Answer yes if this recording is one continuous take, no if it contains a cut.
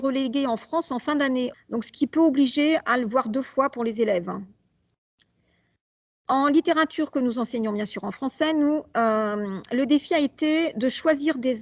no